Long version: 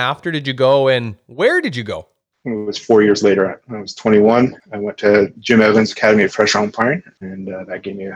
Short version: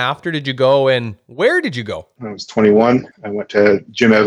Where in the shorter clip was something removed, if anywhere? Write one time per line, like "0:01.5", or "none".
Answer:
0:02.2